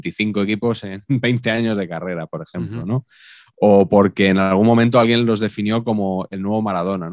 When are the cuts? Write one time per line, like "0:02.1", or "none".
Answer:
none